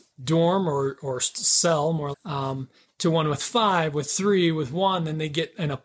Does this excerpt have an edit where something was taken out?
yes; 1 cut; at 2.1 s

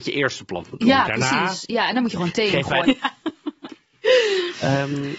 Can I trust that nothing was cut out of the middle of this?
no; 1 cut; at 2.8 s

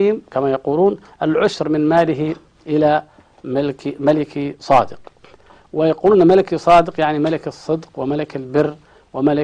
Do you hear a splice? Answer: no; 0 cuts

